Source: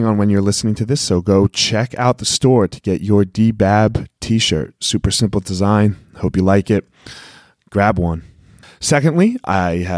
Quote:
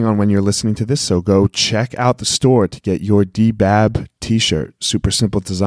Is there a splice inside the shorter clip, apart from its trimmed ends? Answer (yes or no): no